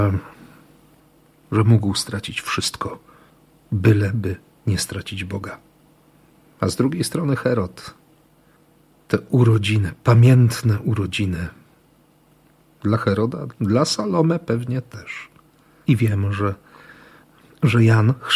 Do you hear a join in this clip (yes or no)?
yes